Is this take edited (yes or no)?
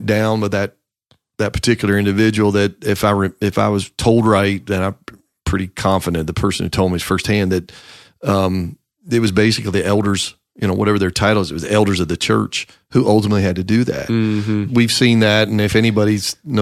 yes